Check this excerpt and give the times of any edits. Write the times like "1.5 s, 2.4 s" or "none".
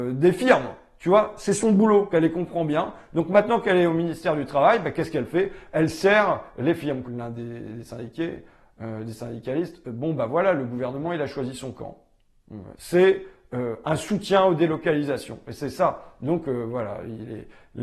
2.1 s, 7.0 s, 12.7 s